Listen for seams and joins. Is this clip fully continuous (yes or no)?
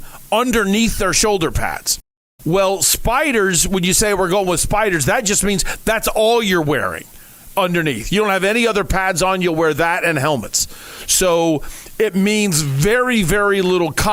yes